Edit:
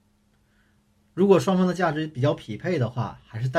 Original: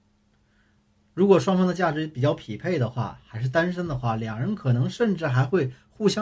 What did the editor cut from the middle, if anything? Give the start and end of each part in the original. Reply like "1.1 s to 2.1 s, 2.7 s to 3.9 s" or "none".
none